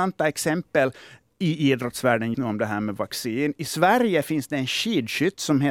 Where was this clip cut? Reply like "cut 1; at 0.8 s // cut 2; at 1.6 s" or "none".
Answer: cut 1; at 2.3 s